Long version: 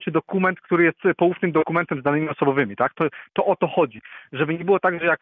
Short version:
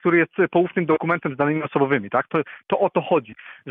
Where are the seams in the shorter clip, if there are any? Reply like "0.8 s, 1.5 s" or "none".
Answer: none